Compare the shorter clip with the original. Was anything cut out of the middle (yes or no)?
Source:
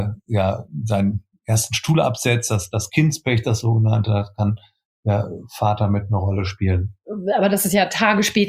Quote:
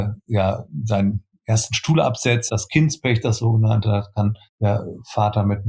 yes